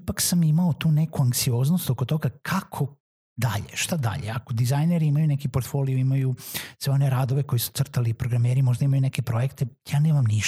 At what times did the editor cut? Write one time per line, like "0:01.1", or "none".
none